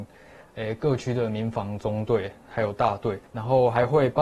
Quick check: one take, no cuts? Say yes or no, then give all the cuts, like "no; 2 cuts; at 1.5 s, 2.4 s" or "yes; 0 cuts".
no; 1 cut; at 3.3 s